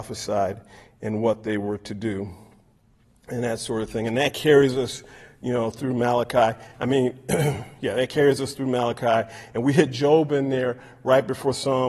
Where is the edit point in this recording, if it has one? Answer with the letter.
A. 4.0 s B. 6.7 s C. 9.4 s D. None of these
D